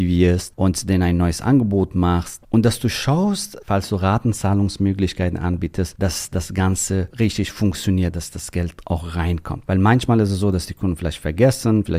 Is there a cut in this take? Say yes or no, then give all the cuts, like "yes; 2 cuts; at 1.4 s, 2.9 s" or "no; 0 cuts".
yes; 1 cut; at 8.1 s